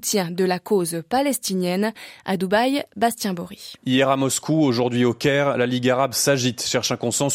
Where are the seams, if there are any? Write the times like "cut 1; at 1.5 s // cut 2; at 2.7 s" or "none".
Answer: cut 1; at 3.8 s